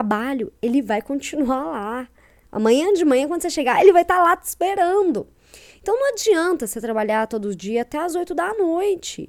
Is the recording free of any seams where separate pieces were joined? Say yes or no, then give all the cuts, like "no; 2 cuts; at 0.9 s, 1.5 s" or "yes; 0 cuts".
yes; 0 cuts